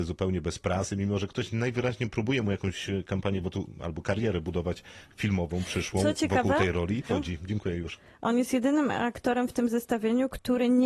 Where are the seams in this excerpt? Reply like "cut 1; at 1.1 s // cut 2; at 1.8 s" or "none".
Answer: cut 1; at 7.1 s